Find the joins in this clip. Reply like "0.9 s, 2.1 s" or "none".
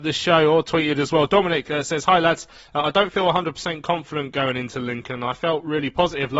none